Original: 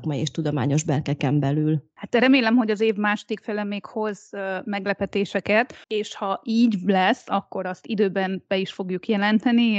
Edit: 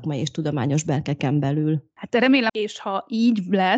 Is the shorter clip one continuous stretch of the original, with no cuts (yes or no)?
no